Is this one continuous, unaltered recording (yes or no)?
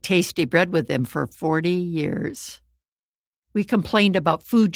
no